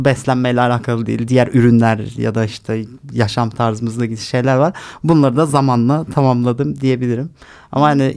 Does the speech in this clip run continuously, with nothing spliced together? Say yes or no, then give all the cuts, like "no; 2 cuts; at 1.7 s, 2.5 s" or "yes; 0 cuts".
no; 1 cut; at 1.3 s